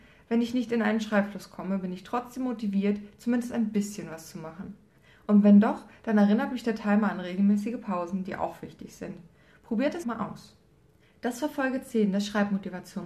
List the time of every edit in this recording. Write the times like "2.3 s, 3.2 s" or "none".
10.0 s